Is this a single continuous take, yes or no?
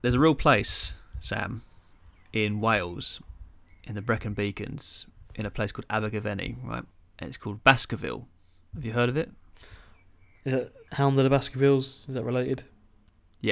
yes